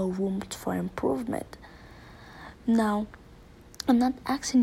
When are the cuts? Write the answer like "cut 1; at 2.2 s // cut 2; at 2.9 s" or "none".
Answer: none